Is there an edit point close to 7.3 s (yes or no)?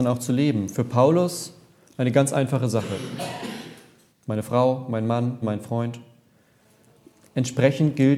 no